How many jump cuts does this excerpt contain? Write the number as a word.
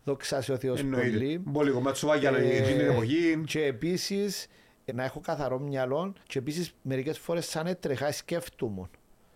two